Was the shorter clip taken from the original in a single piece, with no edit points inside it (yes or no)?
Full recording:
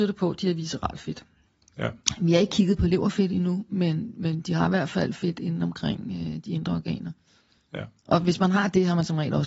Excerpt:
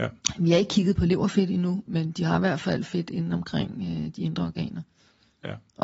no